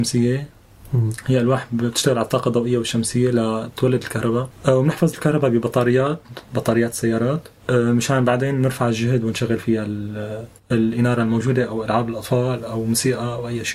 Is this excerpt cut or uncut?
uncut